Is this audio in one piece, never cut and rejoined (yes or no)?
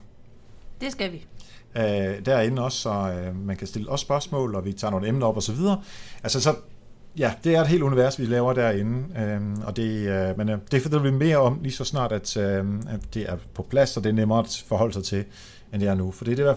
yes